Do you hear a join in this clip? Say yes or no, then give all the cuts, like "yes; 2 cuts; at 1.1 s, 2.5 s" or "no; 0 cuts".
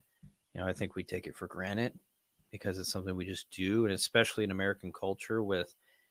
no; 0 cuts